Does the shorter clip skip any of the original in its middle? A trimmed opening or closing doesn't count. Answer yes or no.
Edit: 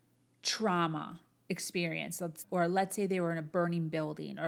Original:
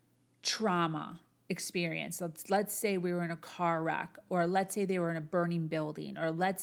yes